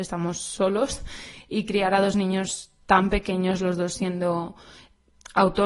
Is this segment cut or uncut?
uncut